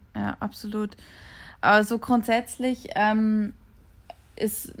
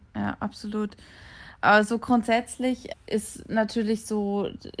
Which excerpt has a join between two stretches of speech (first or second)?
second